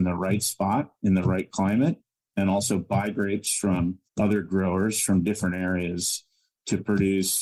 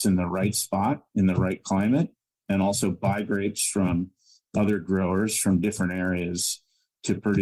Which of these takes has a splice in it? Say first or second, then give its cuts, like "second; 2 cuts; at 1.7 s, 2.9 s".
first; 1 cut; at 4.1 s